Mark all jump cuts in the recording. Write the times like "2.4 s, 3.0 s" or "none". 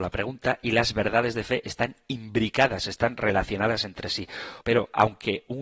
4.6 s